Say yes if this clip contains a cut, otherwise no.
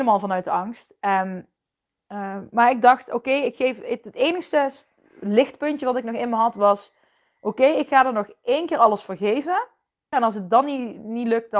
yes